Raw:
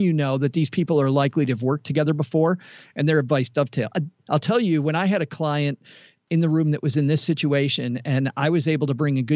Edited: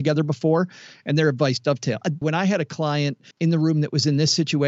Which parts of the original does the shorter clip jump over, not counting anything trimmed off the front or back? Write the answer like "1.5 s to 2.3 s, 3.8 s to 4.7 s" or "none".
4.1 s to 4.8 s, 5.9 s to 6.2 s